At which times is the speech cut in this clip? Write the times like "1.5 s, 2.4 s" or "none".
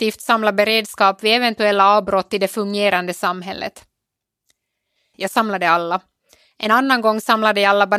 5.1 s